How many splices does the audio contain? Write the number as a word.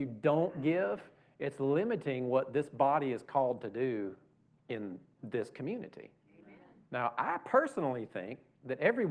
one